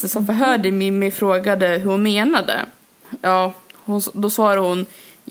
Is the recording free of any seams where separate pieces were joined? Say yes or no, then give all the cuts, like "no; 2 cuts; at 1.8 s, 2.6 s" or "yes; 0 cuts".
yes; 0 cuts